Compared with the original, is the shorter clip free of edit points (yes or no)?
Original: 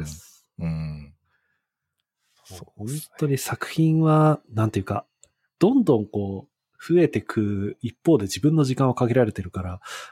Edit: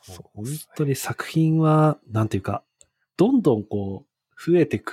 yes